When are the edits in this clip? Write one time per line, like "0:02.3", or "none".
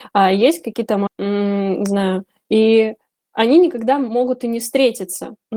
0:01.1